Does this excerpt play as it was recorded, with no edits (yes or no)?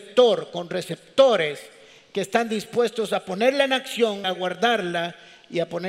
no